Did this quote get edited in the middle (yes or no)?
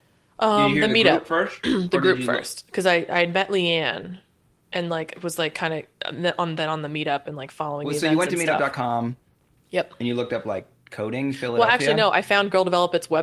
no